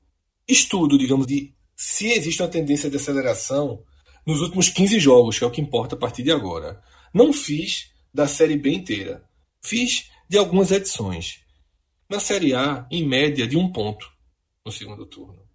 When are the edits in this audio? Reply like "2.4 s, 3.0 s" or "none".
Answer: 1.2 s, 12.0 s